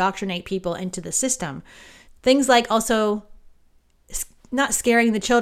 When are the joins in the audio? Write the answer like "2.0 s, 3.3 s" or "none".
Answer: 2.1 s